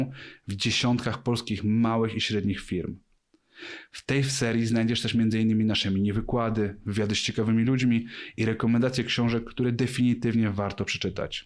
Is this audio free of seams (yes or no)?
yes